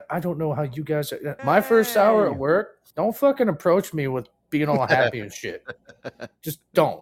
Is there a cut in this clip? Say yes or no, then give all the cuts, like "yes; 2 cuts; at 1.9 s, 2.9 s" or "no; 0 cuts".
yes; 2 cuts; at 1.4 s, 2.9 s